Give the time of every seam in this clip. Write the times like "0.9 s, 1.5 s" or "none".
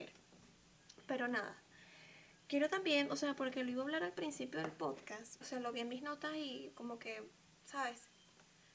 5.4 s